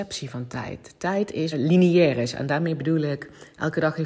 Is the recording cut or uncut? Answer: cut